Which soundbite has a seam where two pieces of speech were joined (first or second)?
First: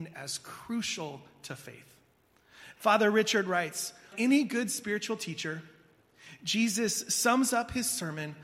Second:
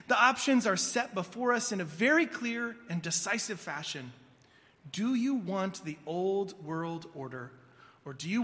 first